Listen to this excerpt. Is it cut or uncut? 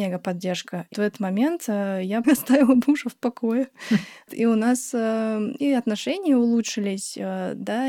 cut